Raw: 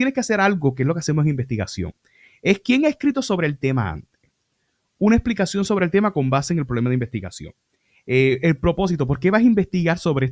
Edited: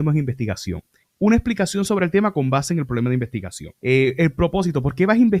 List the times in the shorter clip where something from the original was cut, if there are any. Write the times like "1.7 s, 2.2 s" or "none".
1.0 s, 3.8 s

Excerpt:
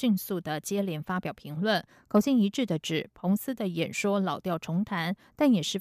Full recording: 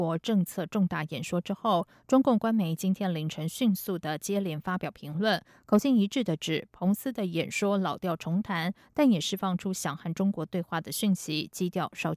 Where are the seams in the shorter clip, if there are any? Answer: none

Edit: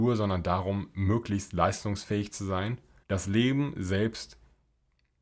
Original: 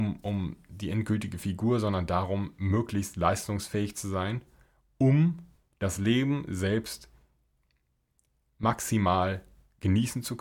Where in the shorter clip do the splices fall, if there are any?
3.0 s

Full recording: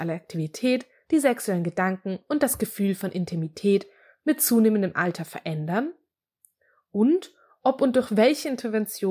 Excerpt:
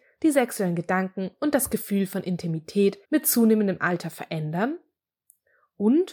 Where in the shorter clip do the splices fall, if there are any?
3.0 s

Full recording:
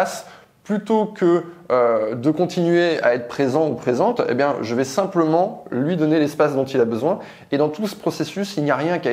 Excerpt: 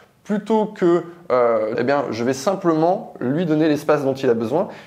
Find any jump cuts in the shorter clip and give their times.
1.8 s

